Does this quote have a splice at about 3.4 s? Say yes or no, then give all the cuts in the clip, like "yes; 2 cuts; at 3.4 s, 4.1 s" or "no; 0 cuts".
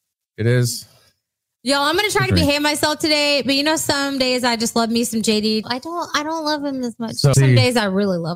no; 2 cuts; at 5.6 s, 7.3 s